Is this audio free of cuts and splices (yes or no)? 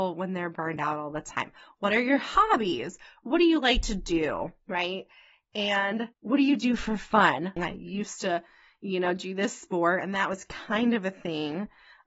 no